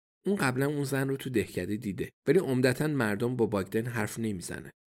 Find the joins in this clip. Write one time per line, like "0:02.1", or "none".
0:02.2